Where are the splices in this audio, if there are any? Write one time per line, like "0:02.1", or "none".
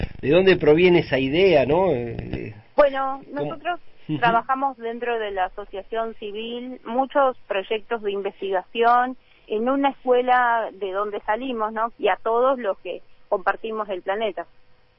0:09.4
0:11.9